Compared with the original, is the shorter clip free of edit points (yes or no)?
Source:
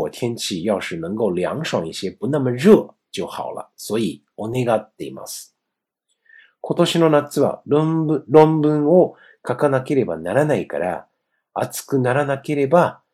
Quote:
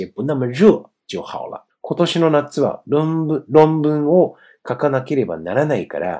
no